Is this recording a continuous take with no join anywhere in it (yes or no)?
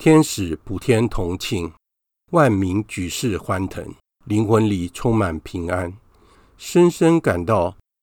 no